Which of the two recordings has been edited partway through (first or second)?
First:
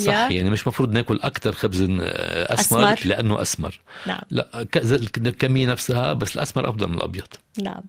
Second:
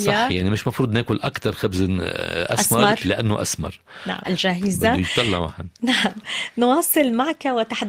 second